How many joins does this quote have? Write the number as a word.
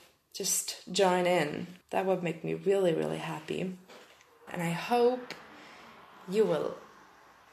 two